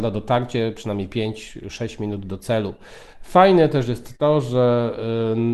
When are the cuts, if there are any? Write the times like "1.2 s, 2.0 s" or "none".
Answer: 3.1 s